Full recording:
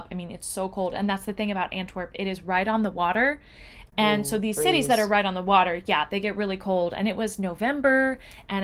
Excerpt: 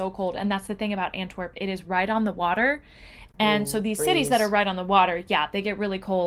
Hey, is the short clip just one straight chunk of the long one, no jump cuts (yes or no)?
yes